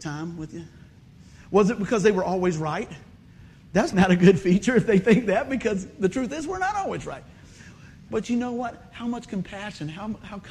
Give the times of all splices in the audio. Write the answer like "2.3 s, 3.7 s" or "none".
3.9 s, 8.1 s